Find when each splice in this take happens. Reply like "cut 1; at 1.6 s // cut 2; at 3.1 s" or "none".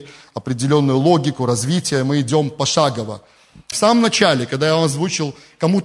cut 1; at 3.7 s